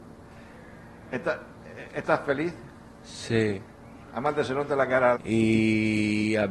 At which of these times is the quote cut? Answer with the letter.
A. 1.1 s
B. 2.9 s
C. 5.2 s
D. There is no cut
C